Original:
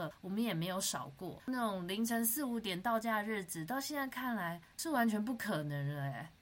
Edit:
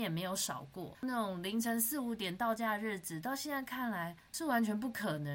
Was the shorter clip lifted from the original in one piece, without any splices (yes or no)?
yes